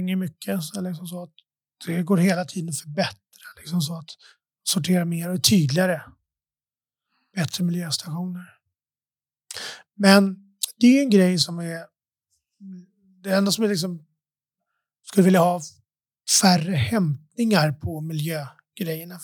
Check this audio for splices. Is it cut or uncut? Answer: uncut